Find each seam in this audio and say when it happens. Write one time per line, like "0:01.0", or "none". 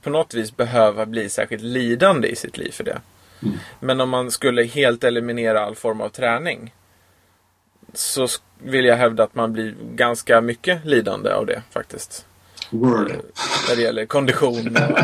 none